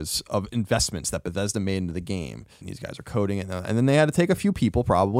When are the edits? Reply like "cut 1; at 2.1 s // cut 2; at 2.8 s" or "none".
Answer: cut 1; at 2.6 s